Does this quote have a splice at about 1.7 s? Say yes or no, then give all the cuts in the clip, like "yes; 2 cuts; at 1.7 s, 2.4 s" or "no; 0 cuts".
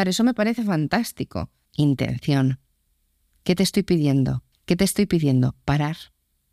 yes; 2 cuts; at 1.7 s, 4.5 s